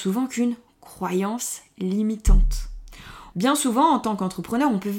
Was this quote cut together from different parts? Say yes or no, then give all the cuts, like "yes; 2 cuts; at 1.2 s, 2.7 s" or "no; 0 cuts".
yes; 1 cut; at 3.3 s